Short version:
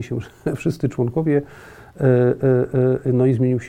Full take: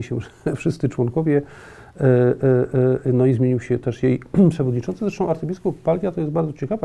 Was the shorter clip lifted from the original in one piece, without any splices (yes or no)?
yes